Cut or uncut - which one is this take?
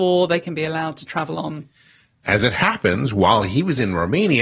uncut